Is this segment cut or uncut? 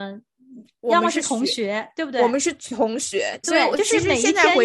cut